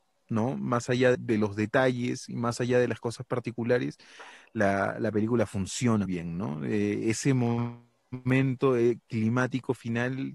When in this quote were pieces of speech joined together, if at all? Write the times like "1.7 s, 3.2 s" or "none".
1.1 s, 6.1 s